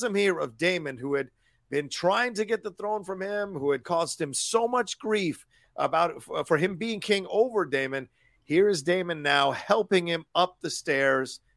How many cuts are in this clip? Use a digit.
0